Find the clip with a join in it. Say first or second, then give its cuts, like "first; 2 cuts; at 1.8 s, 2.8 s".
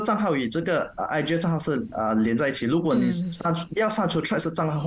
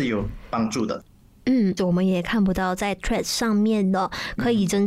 second; 1 cut; at 1.8 s